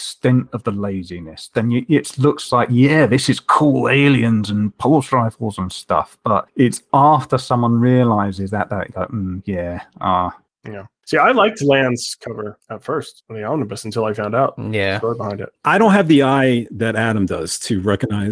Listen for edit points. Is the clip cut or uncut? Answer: uncut